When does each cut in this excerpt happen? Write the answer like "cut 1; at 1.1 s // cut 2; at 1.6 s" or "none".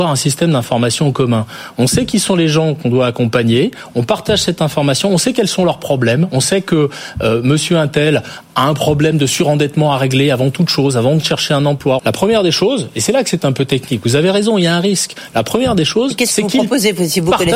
cut 1; at 12.0 s